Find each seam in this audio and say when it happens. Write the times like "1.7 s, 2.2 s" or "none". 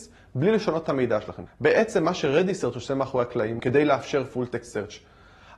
1.5 s, 3.6 s